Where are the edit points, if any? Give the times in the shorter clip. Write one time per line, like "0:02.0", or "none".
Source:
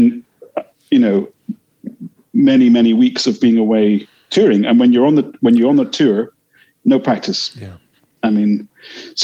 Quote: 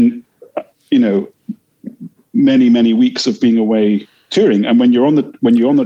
none